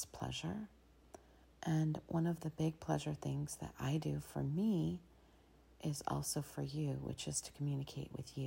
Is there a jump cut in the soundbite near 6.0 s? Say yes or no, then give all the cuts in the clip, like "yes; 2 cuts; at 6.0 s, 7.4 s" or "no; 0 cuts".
no; 1 cut; at 1.4 s